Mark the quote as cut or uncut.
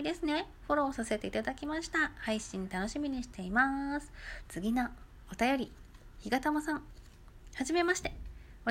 cut